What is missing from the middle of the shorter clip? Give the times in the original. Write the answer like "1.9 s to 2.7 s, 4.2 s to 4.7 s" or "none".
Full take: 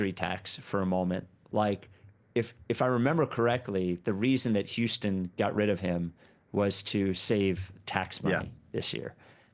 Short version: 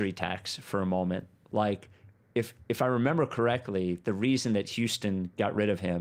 none